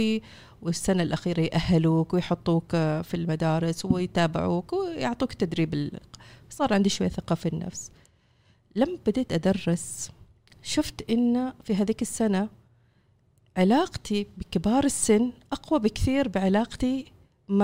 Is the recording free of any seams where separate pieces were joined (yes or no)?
yes